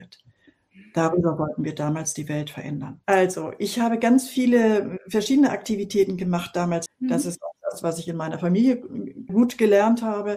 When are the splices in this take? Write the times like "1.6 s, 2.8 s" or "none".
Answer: 6.9 s, 9.3 s